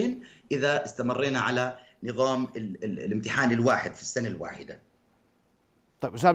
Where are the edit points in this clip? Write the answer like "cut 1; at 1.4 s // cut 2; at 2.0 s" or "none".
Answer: cut 1; at 2.8 s